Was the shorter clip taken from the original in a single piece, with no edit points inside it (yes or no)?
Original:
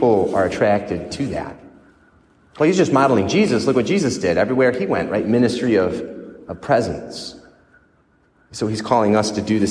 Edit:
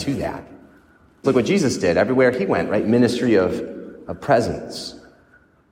no